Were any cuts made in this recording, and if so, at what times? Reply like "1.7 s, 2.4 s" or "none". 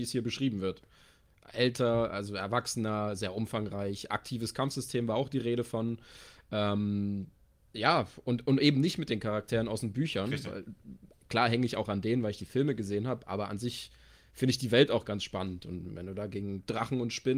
none